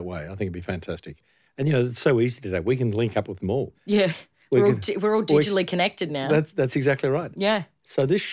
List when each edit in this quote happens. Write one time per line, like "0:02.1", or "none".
0:03.7